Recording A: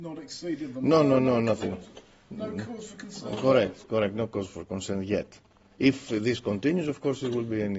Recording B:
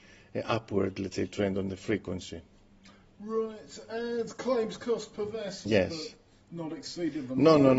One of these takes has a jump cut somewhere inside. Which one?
B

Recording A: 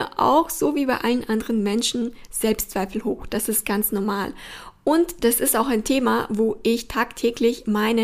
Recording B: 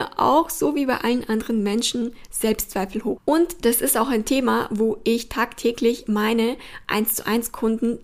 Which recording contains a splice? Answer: B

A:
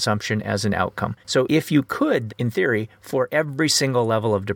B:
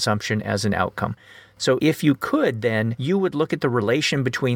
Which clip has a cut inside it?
A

